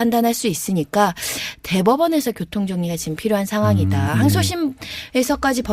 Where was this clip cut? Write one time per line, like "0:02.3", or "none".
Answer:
0:04.1